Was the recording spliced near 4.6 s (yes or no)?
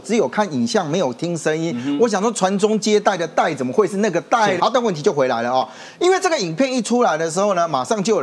yes